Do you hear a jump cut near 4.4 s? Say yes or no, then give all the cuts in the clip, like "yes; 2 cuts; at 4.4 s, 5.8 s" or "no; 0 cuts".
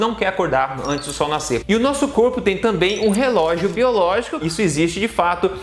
yes; 2 cuts; at 1.6 s, 4.4 s